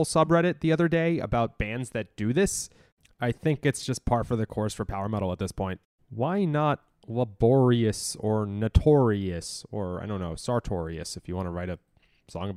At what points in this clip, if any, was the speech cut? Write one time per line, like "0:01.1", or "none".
none